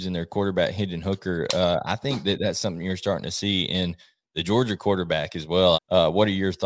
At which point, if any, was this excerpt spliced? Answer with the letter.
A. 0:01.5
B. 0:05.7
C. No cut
B